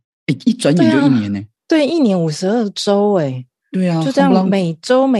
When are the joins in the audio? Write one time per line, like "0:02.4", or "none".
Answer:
0:01.6